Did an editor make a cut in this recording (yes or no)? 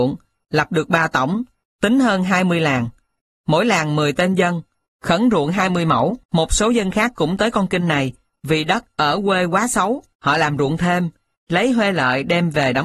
yes